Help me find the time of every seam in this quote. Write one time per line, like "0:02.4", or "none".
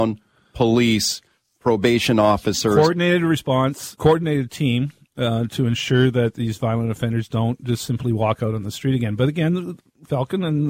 0:04.0